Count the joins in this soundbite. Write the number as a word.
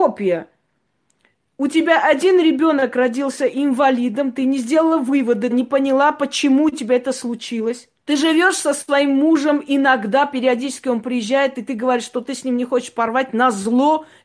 two